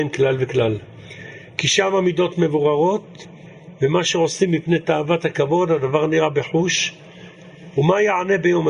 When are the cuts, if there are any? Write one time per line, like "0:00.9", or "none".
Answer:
none